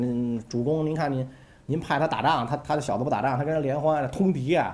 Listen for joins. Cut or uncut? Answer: uncut